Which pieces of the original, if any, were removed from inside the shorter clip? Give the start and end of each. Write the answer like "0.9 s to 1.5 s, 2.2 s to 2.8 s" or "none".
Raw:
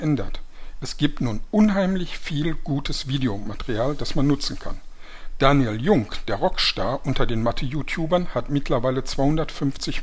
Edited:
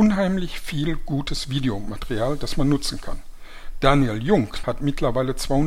6.2 s to 8.3 s

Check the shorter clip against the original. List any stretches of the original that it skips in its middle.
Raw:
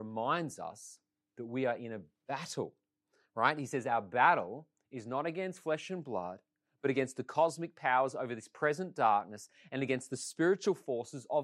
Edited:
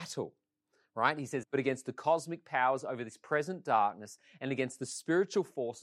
3.8 s to 6.7 s

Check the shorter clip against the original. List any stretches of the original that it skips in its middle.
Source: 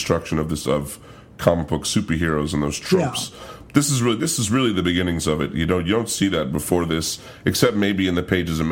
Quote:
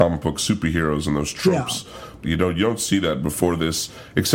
3.7 s to 5.5 s

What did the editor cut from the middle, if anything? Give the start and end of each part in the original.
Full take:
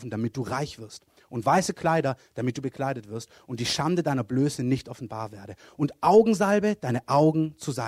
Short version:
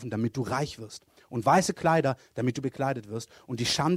none

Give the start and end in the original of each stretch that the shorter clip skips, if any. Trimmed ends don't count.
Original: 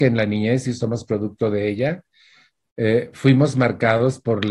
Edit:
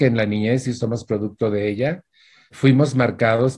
2.5 s to 3.1 s

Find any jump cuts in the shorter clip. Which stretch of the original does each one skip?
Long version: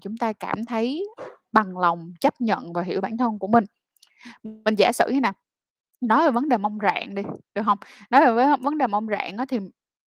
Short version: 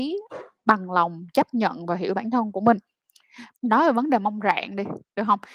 4.4 s to 5.9 s

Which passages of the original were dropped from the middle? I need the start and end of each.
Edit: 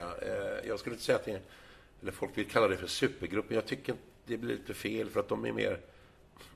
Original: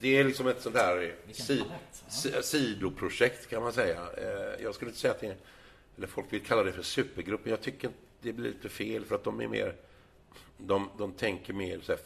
none

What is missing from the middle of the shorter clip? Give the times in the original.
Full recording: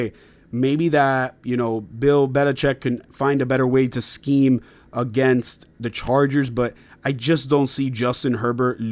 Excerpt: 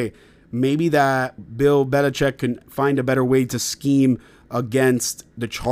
1.4 s to 1.8 s

